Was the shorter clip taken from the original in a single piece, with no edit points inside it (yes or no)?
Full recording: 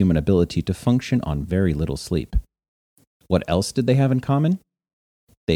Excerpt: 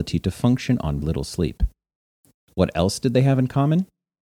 no